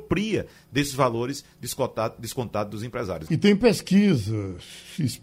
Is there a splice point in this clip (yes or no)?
yes